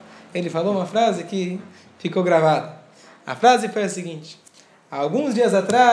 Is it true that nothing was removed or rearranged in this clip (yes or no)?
yes